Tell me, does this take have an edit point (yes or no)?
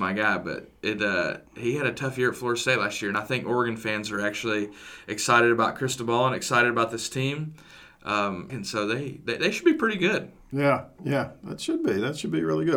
yes